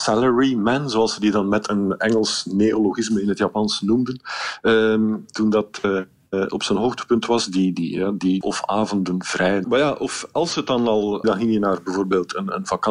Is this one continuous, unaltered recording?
no; 3 cuts; at 8.4 s, 9.6 s, 11.2 s

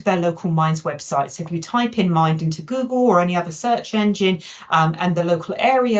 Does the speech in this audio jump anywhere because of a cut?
no; 0 cuts

